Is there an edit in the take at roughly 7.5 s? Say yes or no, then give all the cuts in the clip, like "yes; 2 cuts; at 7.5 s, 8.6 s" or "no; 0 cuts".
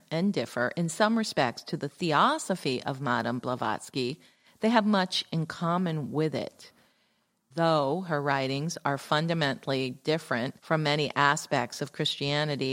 yes; 2 cuts; at 7.5 s, 10.6 s